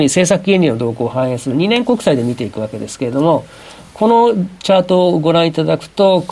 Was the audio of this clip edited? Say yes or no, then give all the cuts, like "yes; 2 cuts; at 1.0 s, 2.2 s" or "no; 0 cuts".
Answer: no; 0 cuts